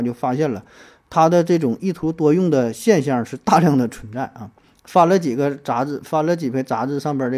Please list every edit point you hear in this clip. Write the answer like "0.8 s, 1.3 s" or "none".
none